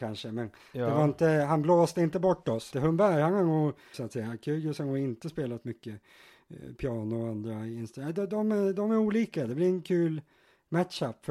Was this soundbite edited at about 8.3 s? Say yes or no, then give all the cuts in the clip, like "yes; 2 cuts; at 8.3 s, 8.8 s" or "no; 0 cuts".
no; 2 cuts; at 2.7 s, 3.9 s